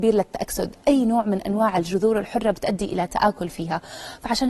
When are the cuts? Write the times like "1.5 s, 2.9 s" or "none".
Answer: none